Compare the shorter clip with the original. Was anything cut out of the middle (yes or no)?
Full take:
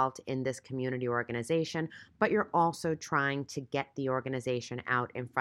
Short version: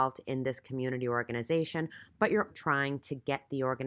yes